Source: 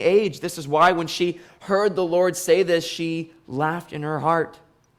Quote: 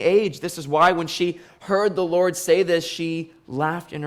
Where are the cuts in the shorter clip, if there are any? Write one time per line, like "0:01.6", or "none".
none